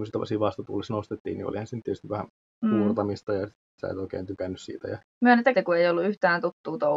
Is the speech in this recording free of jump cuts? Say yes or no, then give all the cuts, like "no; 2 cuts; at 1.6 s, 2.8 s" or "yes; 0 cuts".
no; 1 cut; at 5.5 s